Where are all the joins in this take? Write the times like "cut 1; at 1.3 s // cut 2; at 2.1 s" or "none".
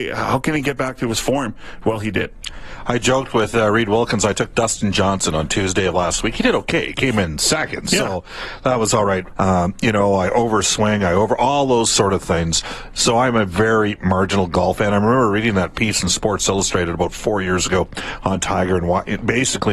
cut 1; at 9.3 s

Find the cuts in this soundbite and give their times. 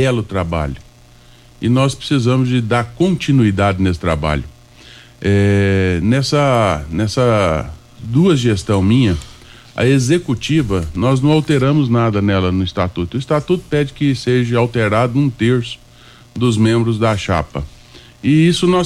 none

